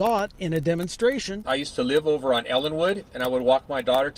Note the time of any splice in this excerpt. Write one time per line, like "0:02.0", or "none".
0:01.4